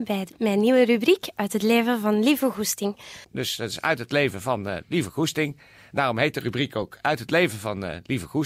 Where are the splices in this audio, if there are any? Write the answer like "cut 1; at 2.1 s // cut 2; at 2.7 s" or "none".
cut 1; at 3.2 s